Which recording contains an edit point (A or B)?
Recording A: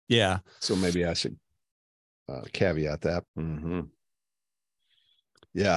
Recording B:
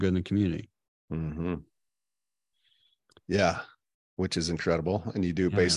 A